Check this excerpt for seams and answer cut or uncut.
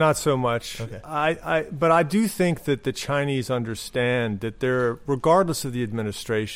uncut